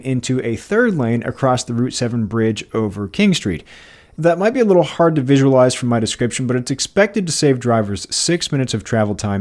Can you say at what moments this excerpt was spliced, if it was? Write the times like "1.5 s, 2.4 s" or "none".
none